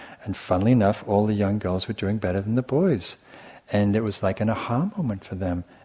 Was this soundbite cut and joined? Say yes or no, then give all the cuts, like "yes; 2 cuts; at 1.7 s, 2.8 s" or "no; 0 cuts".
no; 0 cuts